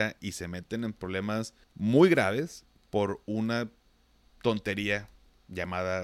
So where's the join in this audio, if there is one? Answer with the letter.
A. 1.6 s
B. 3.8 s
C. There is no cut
A